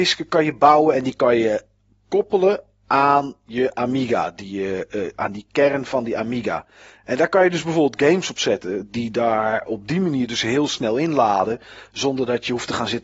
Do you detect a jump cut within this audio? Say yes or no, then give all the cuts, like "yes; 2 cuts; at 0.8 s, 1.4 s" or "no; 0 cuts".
no; 0 cuts